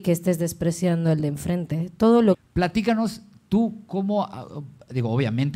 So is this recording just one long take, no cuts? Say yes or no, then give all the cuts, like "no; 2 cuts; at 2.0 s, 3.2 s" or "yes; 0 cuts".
no; 1 cut; at 2.3 s